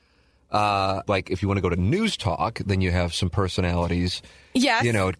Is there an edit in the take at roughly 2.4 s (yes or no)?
no